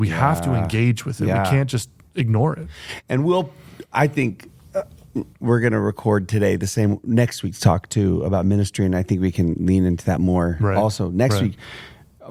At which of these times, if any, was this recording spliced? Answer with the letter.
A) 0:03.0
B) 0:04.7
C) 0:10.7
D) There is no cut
D